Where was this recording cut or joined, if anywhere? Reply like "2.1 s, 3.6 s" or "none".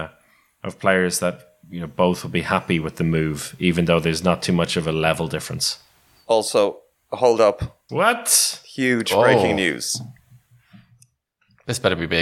7.9 s

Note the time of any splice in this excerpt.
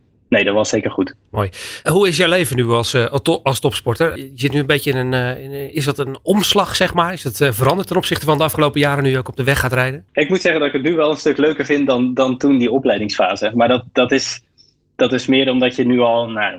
10.1 s

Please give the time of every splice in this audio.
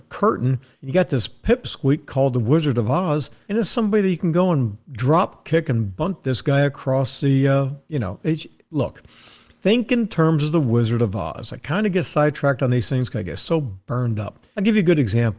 none

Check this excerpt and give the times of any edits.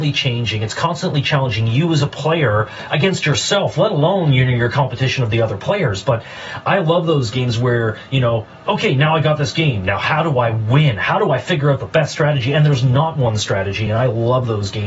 none

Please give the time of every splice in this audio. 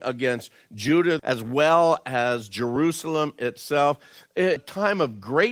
1.2 s, 4.6 s

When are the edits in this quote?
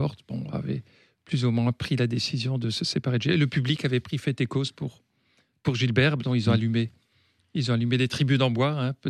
none

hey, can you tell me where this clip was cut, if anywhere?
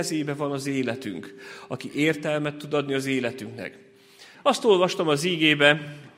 4.3 s

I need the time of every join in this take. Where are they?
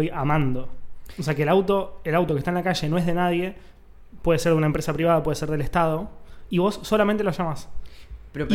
none

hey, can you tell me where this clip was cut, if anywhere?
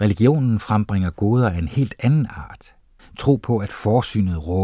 3.0 s

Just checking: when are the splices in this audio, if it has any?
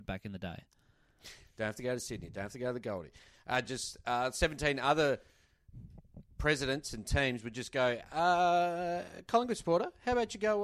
1.4 s

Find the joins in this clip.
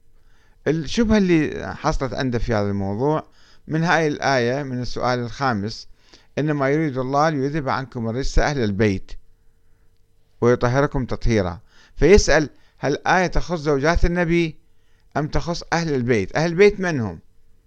none

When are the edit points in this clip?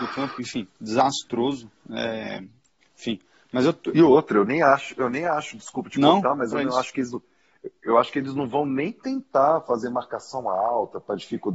none

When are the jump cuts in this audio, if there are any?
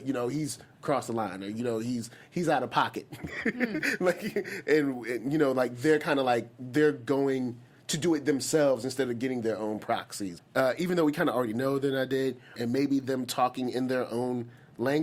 10.4 s, 12.6 s

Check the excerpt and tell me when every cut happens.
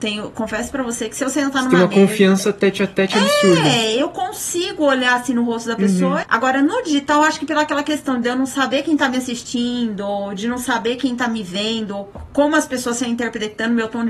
6.2 s

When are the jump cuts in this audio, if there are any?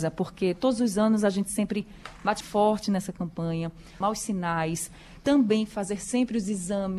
2.4 s, 4.0 s

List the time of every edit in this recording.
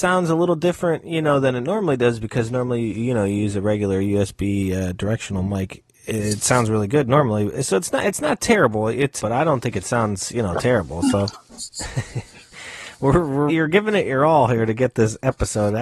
9.2 s, 11.3 s, 13.5 s

